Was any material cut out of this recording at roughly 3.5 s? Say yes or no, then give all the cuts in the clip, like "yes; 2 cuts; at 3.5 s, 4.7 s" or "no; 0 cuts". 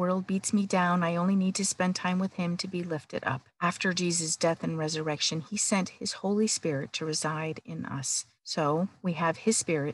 yes; 2 cuts; at 3.5 s, 8.4 s